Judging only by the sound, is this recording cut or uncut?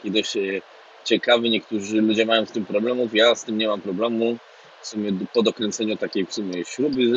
uncut